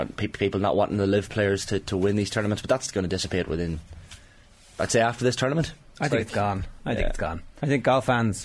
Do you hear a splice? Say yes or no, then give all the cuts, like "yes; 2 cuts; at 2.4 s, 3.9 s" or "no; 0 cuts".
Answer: no; 0 cuts